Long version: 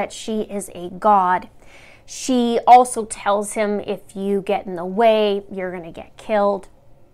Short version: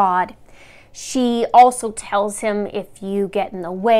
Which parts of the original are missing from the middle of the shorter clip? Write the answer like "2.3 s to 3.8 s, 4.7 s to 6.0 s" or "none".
none